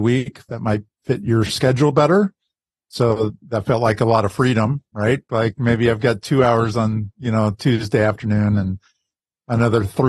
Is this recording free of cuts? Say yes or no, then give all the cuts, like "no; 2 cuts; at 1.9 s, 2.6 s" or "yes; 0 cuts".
no; 1 cut; at 5.3 s